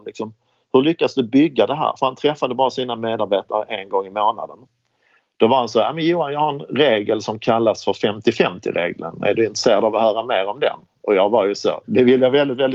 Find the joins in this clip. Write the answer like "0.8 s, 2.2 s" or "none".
11.8 s